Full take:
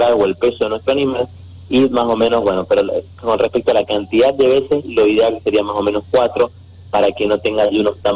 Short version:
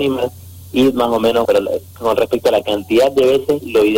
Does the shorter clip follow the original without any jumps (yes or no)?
no